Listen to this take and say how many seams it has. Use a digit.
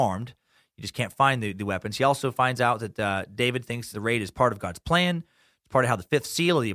1